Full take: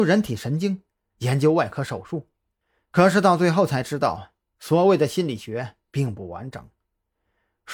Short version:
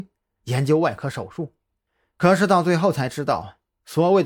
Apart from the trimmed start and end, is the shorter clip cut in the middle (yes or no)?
no